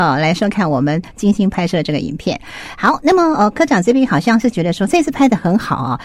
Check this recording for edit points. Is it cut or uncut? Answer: uncut